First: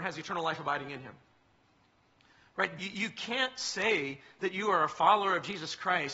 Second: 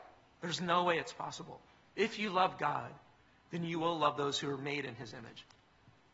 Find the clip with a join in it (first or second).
first